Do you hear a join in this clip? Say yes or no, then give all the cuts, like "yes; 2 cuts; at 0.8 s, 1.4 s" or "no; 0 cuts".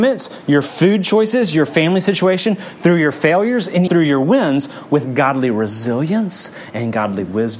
yes; 1 cut; at 3.9 s